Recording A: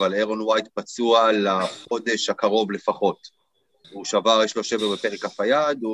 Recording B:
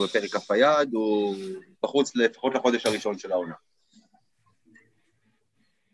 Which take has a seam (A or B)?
A